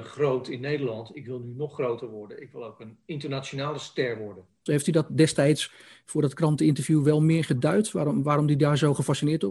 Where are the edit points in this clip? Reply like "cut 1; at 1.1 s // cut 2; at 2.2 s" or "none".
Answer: cut 1; at 4.7 s